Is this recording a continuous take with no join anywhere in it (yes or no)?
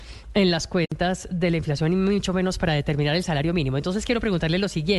yes